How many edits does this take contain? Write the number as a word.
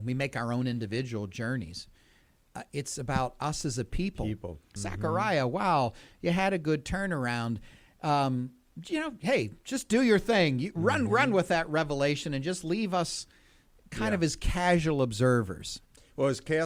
one